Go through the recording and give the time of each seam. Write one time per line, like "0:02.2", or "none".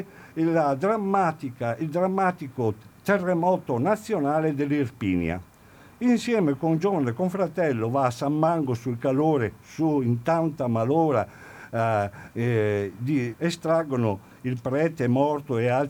0:13.3

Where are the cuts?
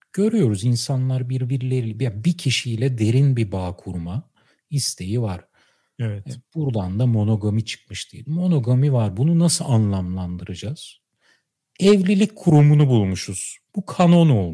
none

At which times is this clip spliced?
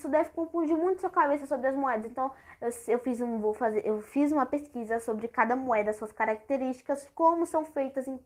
none

